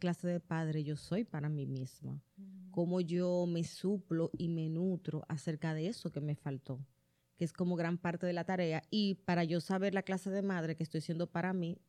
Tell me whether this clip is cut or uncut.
uncut